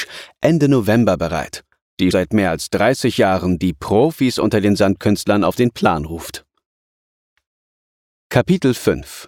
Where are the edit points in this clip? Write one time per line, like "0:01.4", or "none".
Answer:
0:02.1